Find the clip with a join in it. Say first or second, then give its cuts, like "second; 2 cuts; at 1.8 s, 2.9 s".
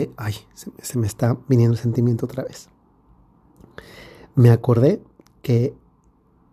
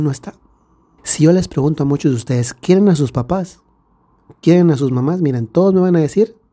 second; 1 cut; at 1.0 s